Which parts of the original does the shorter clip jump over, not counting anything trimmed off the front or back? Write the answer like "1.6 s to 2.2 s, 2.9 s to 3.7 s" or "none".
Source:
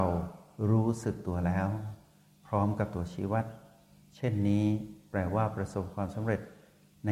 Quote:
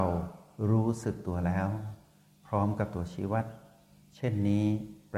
none